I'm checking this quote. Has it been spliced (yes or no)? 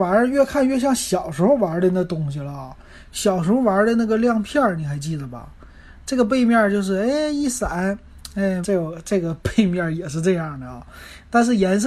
yes